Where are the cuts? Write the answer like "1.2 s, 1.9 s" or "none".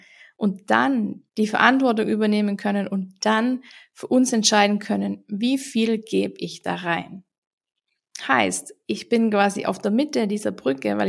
1.3 s